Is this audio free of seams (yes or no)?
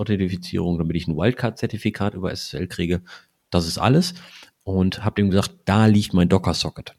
yes